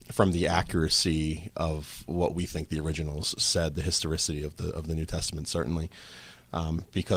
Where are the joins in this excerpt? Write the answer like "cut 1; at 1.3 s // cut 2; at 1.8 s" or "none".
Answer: none